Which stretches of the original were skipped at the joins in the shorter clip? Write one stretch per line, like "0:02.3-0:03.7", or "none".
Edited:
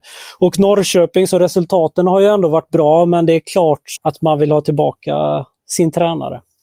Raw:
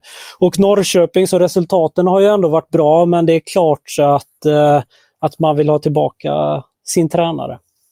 0:04.0-0:05.1